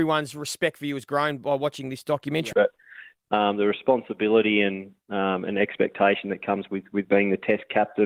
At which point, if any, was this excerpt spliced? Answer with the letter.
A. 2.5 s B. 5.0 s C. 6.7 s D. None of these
A